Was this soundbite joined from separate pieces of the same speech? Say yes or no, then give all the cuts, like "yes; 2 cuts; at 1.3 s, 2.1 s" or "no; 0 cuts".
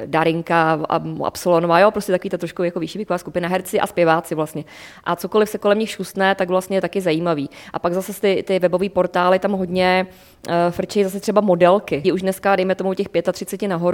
yes; 1 cut; at 12.0 s